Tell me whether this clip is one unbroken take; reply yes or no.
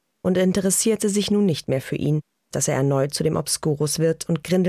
no